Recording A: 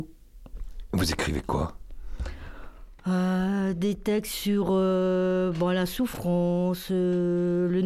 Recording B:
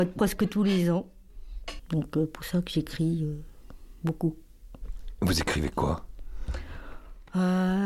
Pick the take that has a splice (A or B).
B